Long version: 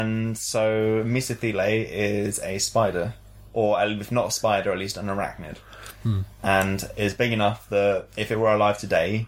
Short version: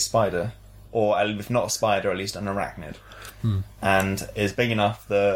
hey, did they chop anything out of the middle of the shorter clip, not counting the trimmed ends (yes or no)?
no